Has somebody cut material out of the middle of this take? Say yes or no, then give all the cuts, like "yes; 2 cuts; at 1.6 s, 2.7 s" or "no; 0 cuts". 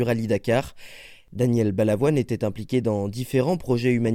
no; 0 cuts